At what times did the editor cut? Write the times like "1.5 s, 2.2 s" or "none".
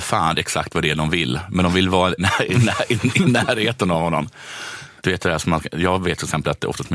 2.2 s, 5.0 s